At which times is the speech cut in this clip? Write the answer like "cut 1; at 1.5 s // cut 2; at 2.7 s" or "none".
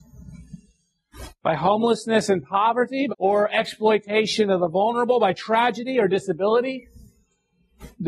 cut 1; at 3.1 s